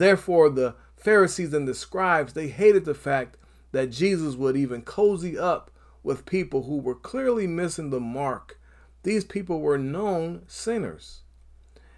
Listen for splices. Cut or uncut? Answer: uncut